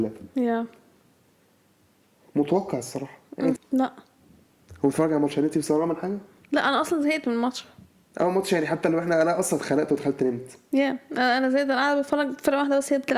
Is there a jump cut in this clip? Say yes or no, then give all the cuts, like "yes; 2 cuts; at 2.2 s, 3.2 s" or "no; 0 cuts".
yes; 1 cut; at 3.6 s